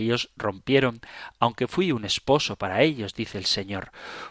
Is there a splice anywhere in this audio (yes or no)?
no